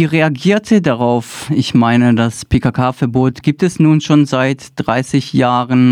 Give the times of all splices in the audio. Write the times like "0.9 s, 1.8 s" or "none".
1.5 s